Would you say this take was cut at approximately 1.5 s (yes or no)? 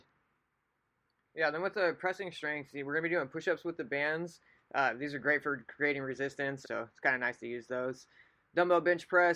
no